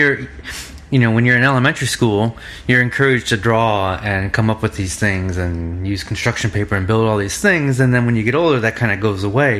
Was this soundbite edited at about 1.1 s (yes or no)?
no